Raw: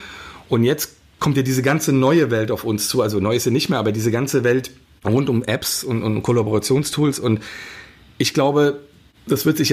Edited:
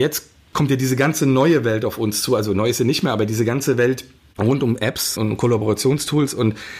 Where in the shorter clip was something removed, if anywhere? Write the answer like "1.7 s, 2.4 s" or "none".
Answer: 5.2 s